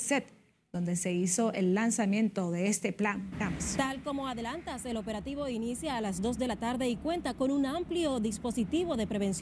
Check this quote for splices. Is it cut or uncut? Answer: cut